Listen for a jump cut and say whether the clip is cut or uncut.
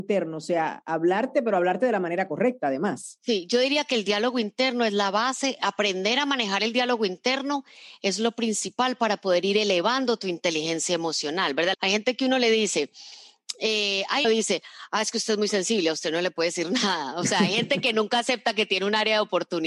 cut